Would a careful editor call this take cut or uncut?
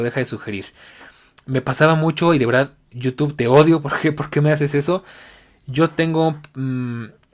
uncut